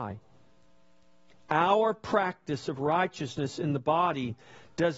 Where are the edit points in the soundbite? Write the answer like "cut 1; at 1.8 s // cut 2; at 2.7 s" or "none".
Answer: none